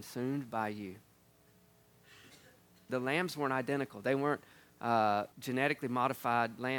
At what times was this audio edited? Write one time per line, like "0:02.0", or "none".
0:02.9
0:05.3